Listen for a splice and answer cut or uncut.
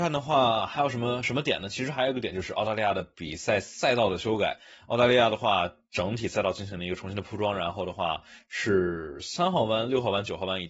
uncut